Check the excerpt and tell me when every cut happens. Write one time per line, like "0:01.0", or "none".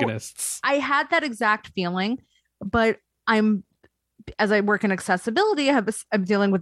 none